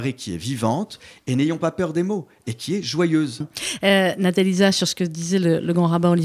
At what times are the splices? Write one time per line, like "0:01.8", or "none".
0:03.4